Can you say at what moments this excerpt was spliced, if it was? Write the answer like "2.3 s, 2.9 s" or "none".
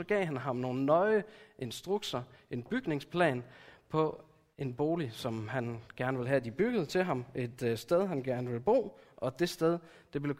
none